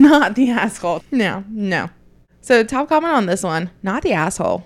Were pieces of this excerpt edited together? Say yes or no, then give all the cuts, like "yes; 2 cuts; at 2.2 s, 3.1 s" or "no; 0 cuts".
yes; 1 cut; at 1.0 s